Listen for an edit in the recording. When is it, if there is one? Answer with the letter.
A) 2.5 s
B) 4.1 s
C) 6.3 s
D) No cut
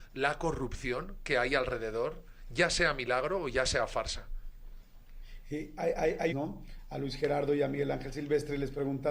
C